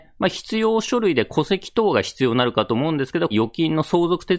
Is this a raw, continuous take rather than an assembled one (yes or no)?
no